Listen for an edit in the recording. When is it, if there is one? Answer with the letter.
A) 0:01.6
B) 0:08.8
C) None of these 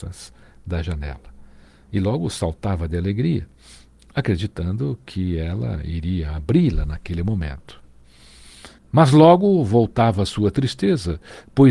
B